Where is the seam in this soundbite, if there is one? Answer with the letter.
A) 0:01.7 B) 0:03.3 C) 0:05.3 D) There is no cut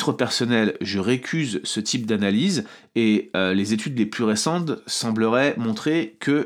D